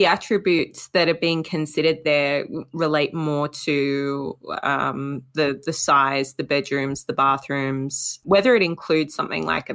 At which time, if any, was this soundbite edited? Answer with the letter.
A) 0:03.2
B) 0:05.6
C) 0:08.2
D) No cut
C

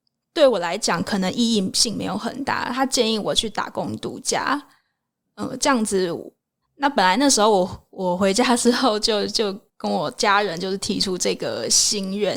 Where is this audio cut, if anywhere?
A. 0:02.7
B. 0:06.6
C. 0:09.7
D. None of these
B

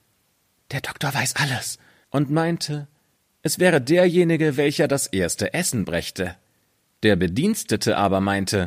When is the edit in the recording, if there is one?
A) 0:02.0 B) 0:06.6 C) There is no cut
A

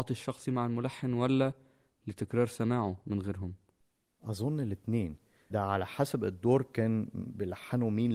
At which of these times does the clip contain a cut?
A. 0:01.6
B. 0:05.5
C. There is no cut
B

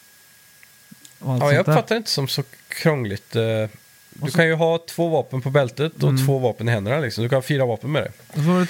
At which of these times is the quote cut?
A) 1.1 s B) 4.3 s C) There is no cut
C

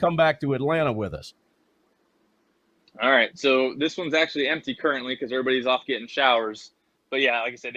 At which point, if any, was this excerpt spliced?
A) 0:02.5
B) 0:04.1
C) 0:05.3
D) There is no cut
D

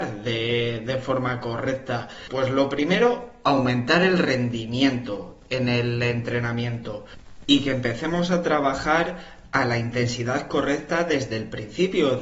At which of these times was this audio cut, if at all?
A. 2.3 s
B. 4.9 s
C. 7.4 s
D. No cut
A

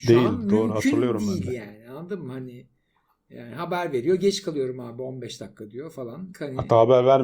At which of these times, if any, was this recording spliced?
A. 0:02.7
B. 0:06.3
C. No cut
B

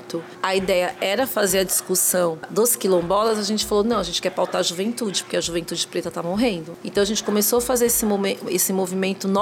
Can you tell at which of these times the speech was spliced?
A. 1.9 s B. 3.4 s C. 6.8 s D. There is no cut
C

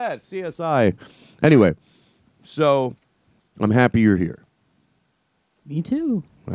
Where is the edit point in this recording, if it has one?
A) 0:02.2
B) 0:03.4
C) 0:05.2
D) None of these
B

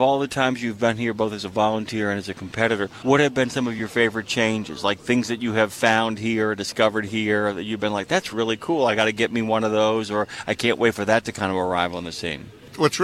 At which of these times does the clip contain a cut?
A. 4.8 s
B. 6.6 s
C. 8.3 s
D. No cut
C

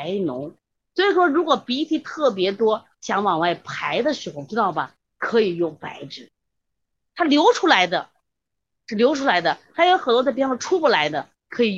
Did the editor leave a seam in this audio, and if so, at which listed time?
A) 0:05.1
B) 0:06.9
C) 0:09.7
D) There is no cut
D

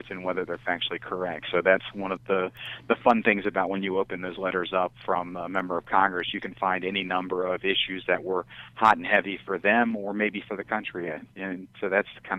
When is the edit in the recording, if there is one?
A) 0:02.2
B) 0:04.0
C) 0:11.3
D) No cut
A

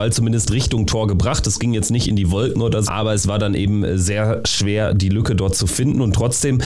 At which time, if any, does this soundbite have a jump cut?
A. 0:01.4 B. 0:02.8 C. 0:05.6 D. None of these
B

